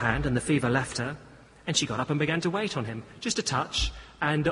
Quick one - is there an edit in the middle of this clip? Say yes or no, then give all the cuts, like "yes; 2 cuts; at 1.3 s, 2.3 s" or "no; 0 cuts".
no; 0 cuts